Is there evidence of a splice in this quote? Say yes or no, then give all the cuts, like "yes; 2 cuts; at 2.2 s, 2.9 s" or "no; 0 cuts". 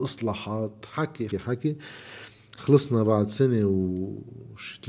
yes; 1 cut; at 1.3 s